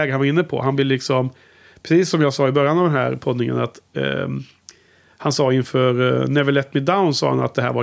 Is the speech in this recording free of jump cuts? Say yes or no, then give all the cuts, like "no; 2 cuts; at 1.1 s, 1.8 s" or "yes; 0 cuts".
yes; 0 cuts